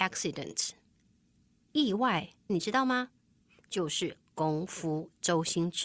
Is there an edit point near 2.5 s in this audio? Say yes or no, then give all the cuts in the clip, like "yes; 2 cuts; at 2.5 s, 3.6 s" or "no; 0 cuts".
yes; 1 cut; at 2.5 s